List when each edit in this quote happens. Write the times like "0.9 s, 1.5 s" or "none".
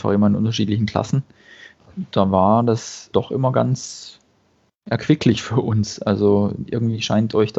3.1 s